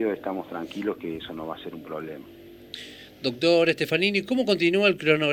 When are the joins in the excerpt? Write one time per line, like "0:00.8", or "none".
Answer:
none